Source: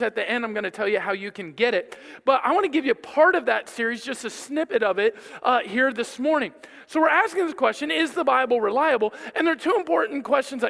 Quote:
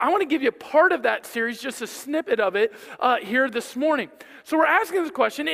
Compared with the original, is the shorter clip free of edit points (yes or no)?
yes